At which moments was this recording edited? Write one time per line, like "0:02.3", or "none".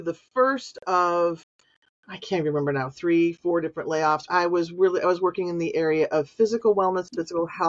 0:04.3